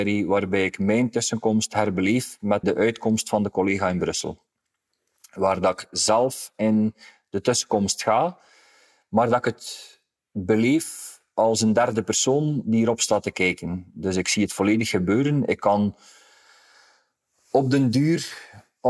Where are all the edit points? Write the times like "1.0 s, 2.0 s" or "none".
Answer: 2.6 s